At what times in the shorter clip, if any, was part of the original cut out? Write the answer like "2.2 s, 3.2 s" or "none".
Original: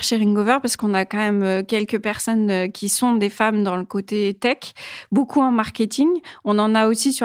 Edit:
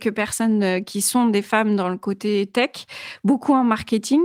none